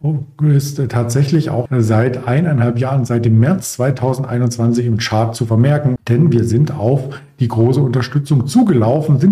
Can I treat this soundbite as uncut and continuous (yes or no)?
no